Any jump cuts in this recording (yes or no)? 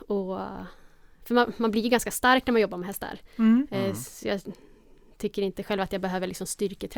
no